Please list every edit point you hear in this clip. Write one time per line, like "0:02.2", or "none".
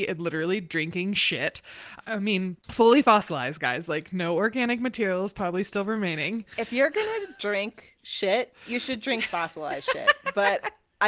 0:02.6